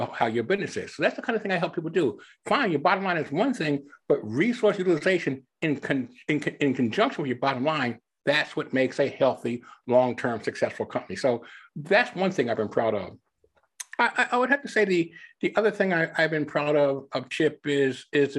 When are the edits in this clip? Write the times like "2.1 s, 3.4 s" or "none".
none